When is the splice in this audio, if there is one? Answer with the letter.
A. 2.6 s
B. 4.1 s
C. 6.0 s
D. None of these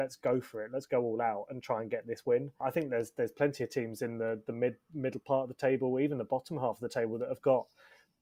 A